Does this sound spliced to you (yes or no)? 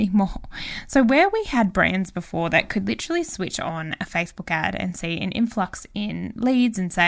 no